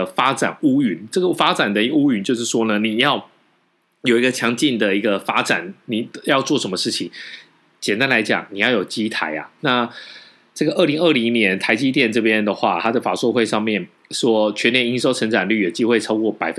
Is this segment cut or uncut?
uncut